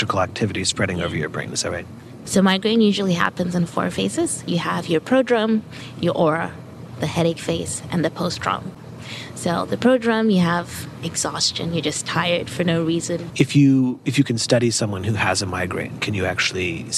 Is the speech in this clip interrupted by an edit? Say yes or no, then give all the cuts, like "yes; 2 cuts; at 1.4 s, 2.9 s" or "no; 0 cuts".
yes; 2 cuts; at 2.2 s, 13.3 s